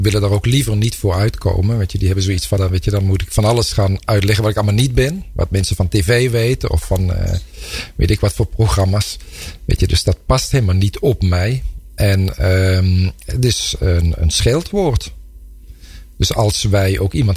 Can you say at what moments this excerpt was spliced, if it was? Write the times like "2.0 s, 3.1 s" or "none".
2.6 s